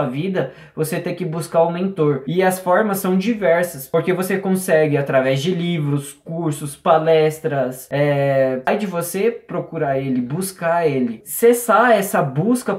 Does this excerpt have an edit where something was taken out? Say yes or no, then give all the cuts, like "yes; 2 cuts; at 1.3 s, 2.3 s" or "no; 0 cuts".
yes; 1 cut; at 8.6 s